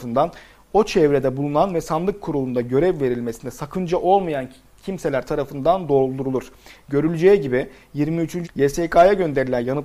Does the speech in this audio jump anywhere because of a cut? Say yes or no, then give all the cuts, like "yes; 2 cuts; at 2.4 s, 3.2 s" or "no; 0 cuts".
yes; 1 cut; at 8.4 s